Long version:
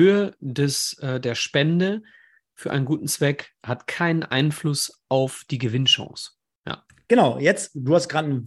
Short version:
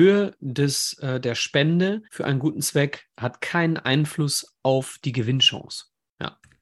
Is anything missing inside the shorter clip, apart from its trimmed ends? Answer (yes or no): yes